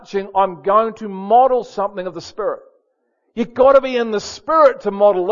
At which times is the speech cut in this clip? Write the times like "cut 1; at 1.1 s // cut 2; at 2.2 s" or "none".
none